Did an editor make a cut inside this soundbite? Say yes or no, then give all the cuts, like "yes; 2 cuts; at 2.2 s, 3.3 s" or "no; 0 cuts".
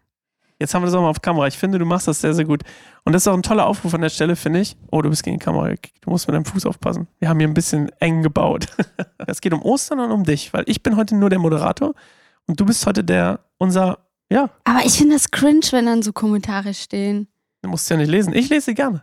yes; 1 cut; at 9.3 s